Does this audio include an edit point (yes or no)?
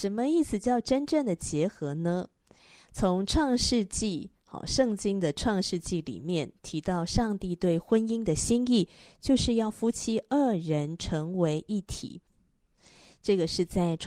no